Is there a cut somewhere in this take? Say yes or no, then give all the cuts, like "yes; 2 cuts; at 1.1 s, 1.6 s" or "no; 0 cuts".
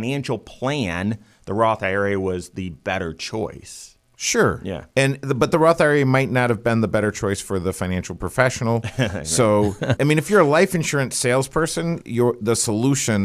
yes; 2 cuts; at 10.0 s, 12.0 s